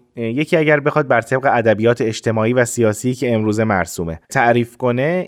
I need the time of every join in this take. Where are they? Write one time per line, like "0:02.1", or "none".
0:04.2